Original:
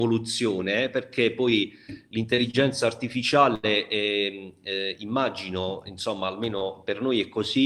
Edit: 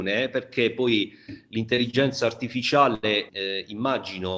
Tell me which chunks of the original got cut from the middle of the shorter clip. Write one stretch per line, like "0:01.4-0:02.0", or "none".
0:03.9-0:04.6